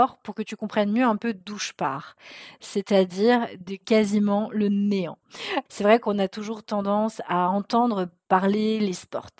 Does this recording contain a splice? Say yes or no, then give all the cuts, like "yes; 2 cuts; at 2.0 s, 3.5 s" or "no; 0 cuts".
yes; 1 cut; at 5.7 s